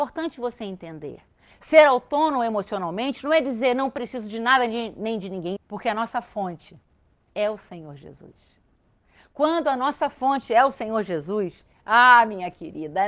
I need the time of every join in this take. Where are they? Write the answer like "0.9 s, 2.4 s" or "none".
5.6 s